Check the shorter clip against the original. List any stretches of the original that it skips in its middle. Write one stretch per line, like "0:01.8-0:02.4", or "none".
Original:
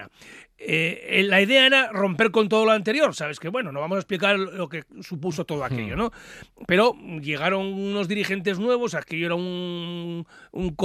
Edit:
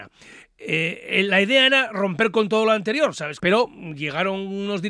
0:03.4-0:06.7